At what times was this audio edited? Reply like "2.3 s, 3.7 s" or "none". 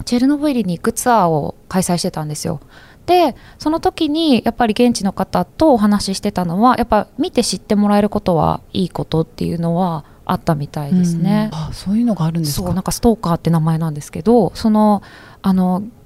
5.5 s, 11.5 s